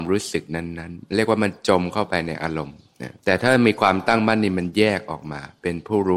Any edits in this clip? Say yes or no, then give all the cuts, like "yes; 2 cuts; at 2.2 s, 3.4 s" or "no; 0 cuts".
yes; 1 cut; at 3.2 s